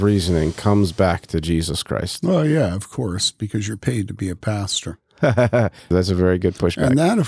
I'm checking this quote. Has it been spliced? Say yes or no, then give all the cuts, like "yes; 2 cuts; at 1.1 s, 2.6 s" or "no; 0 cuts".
no; 0 cuts